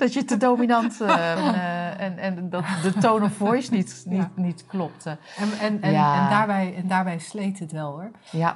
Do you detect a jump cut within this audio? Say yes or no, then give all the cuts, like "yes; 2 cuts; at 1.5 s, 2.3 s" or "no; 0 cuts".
yes; 1 cut; at 1.4 s